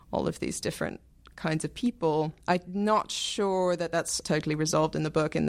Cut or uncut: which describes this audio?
cut